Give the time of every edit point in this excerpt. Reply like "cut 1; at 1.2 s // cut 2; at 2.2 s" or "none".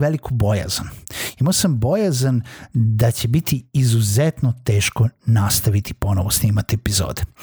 none